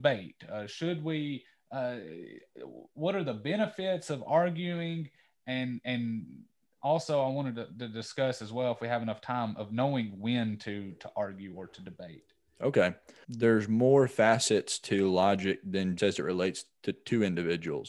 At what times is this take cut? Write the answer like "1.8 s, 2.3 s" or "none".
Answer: 13.2 s, 16.0 s